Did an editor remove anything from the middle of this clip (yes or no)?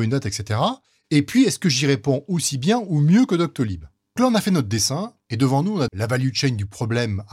yes